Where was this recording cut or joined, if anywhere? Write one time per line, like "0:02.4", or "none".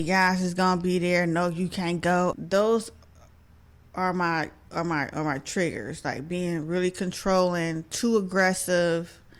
0:02.3